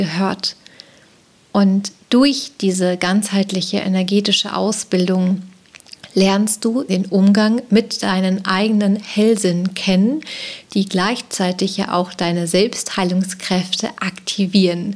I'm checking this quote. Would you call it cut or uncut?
cut